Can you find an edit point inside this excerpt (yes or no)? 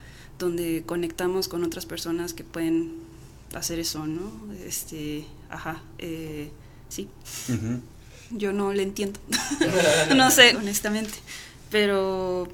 yes